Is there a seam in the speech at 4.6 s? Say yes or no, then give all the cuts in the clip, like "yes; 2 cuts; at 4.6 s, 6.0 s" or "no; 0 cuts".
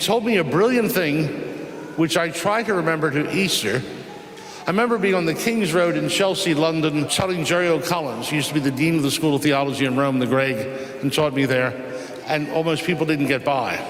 no; 2 cuts; at 7.1 s, 12.2 s